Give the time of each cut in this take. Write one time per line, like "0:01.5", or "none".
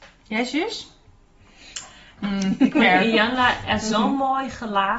0:02.2